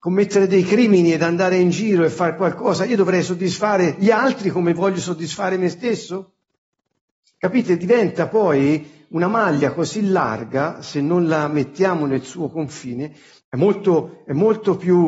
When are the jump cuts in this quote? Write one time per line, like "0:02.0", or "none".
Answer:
0:07.2
0:13.4

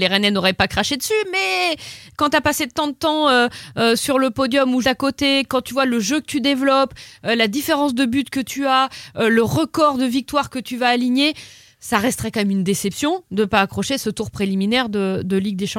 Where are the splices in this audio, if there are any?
0:04.8

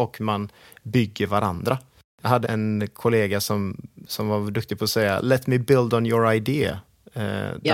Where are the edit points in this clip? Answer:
0:02.4

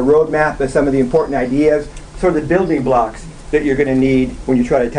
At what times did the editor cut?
none

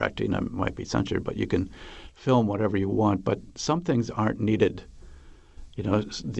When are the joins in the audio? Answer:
none

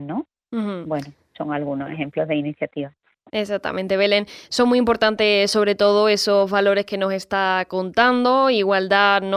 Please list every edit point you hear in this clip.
none

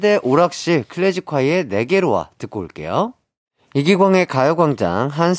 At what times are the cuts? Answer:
none

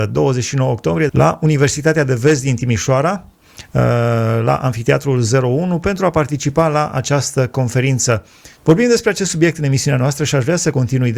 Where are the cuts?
0:01.1
0:08.6

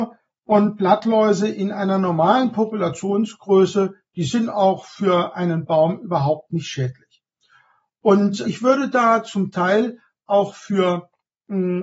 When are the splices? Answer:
0:08.4

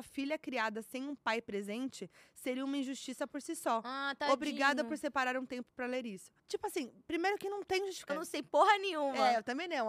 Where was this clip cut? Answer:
0:06.4
0:08.1

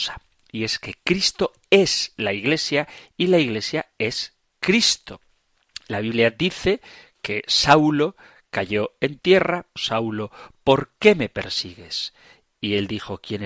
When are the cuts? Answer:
0:09.8

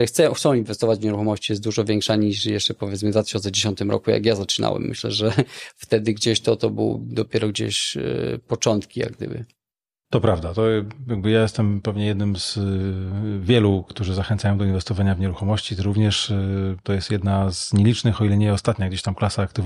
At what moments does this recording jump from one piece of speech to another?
none

